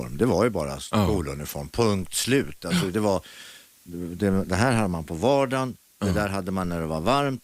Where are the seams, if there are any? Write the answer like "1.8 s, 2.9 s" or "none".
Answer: none